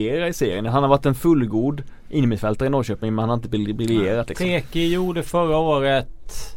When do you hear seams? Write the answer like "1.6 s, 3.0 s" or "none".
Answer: none

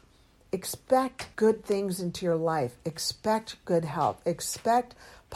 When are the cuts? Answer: 1.3 s

